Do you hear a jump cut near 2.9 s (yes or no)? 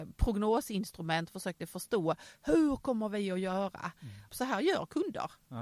no